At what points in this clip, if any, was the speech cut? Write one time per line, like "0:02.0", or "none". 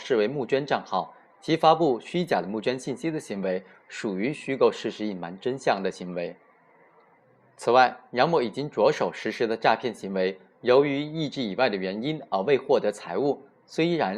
none

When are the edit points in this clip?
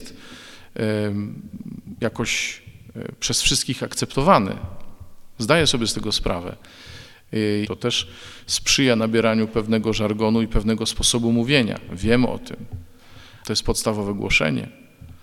0:07.6
0:13.4

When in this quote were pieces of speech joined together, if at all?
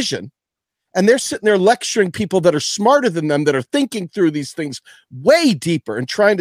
none

